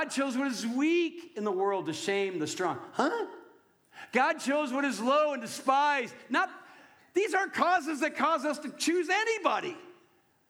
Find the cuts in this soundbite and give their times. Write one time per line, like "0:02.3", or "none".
none